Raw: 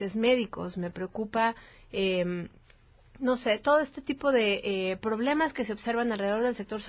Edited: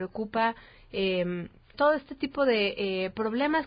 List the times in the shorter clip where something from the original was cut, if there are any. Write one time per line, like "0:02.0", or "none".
0:01.7